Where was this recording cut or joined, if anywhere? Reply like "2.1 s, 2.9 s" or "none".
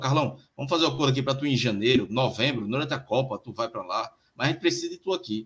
none